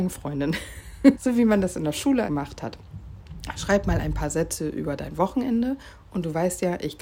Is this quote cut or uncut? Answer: cut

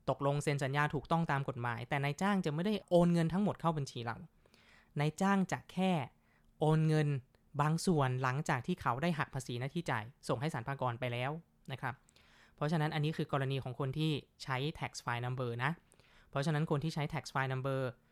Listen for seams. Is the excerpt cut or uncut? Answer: uncut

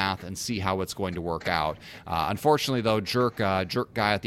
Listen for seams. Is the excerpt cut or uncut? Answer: uncut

